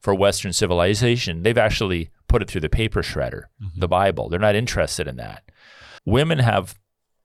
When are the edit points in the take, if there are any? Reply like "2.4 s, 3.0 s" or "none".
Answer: 6.0 s

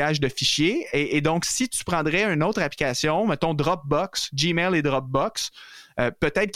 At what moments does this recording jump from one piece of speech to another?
none

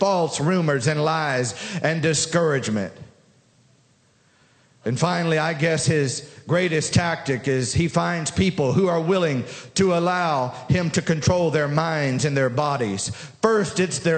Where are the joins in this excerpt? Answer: none

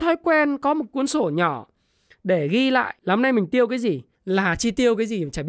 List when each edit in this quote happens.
3.0 s, 4.1 s

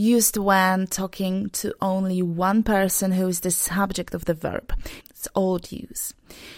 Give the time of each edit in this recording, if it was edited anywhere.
5.0 s

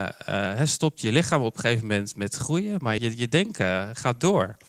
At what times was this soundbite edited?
3.0 s

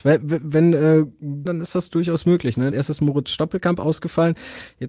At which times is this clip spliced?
1.5 s, 2.7 s

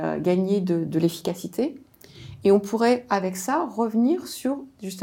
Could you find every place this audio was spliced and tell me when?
none

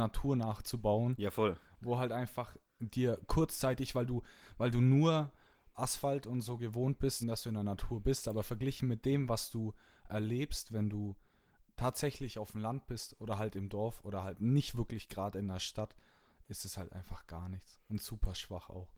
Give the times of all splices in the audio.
7.2 s

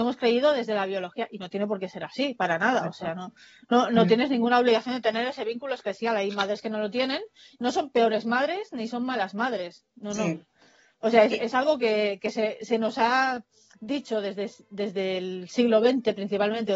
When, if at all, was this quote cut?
none

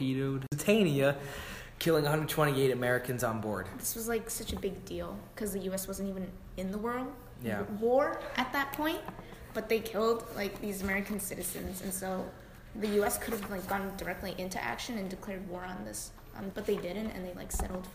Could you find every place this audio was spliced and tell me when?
16.5 s

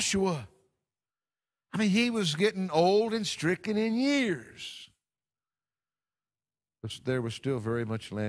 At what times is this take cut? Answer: none

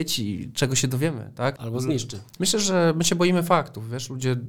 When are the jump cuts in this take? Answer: 2.4 s

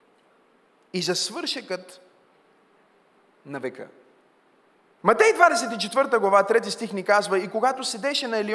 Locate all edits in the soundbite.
5.0 s

